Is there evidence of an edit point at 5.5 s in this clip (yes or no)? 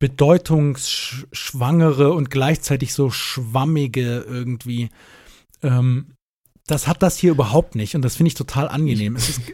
no